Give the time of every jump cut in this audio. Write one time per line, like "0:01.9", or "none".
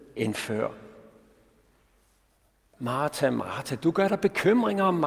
0:02.7